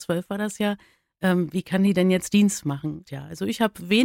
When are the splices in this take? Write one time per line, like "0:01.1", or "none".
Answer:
0:03.1